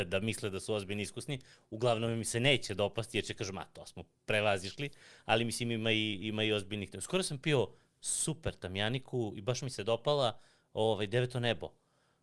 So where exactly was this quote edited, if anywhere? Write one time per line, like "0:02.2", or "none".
none